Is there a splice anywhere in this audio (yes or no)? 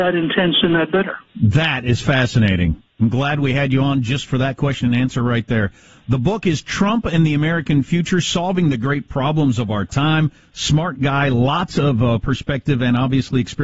yes